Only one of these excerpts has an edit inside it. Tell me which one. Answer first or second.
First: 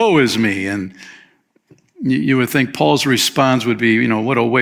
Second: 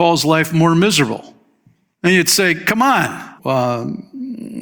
second